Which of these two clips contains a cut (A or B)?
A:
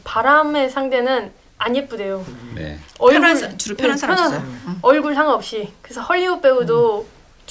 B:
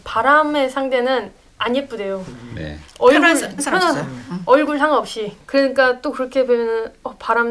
B